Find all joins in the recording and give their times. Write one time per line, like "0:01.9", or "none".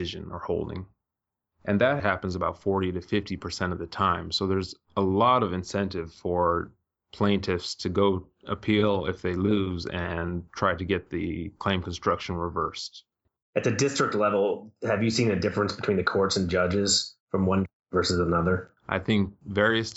0:02.0
0:13.4
0:18.8